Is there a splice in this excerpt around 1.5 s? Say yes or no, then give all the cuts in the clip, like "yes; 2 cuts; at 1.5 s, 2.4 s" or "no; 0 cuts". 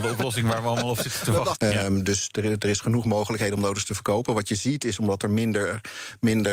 yes; 1 cut; at 1.5 s